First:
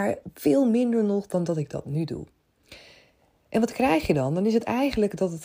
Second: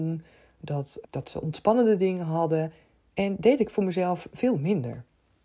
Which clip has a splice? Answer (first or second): second